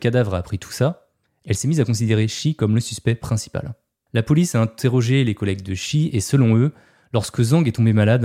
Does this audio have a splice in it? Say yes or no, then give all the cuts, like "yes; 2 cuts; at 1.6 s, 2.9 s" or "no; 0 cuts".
no; 0 cuts